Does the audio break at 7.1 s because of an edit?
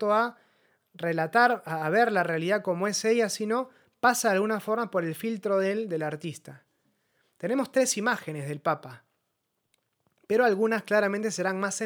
no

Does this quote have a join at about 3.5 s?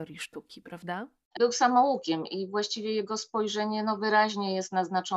no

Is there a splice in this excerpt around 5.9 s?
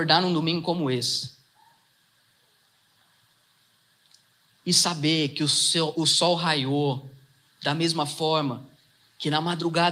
yes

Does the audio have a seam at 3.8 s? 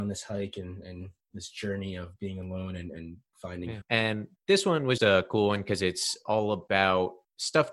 yes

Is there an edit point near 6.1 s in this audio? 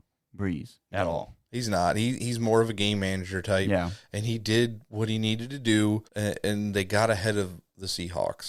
yes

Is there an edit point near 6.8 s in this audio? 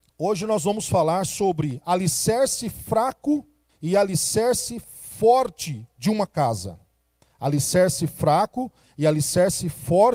no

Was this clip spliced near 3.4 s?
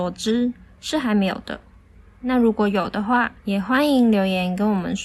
yes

